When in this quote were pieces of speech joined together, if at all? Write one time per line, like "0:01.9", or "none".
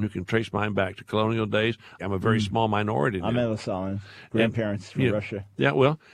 0:02.0